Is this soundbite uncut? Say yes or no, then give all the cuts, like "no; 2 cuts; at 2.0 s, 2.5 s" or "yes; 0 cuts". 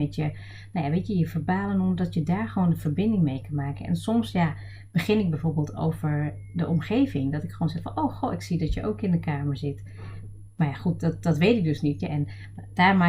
no; 1 cut; at 12.0 s